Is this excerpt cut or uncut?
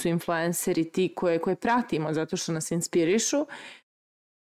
uncut